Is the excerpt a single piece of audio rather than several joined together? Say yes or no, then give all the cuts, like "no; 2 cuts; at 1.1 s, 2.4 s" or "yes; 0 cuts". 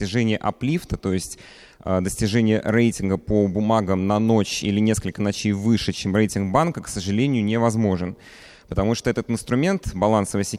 yes; 0 cuts